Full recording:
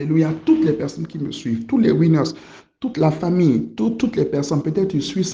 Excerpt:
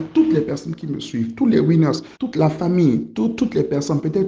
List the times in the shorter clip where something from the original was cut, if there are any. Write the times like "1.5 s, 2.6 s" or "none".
2.1 s